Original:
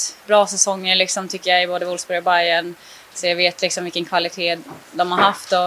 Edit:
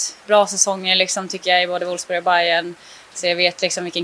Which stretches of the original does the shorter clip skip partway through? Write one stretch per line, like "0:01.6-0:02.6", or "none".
none